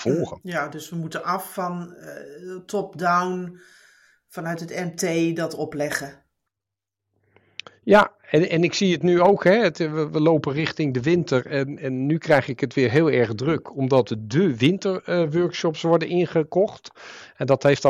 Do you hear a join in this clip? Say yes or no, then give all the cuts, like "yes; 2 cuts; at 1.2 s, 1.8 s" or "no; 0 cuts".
no; 0 cuts